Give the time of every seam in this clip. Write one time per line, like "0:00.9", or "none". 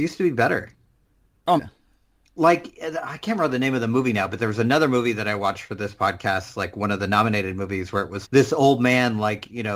0:01.6
0:08.2